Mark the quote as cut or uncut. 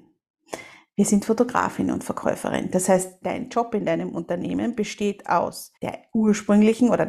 cut